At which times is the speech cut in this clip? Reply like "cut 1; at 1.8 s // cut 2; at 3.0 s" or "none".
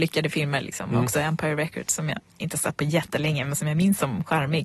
none